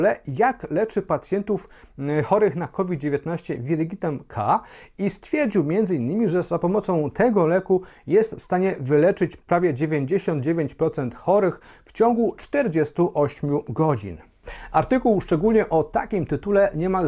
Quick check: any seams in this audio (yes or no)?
no